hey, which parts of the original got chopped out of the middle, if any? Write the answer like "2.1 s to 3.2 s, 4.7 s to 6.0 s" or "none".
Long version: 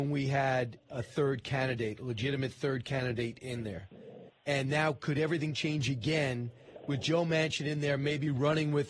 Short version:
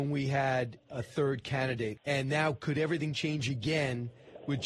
2.0 s to 4.4 s